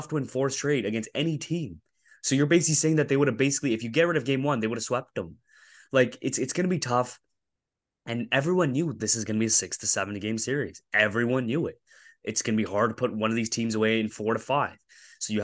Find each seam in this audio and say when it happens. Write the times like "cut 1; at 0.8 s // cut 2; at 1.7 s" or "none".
none